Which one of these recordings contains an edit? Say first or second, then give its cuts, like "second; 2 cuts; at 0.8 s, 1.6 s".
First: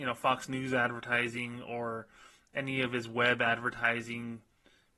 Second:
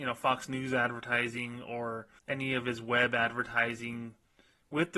second; 1 cut; at 2.2 s